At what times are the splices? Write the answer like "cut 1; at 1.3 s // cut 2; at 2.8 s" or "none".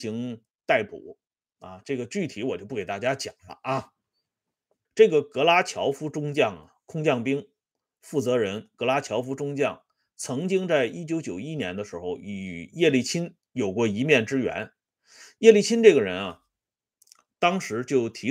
cut 1; at 1.4 s // cut 2; at 4.8 s